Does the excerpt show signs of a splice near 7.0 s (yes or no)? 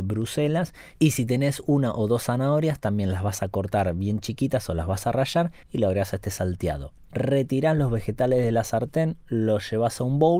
no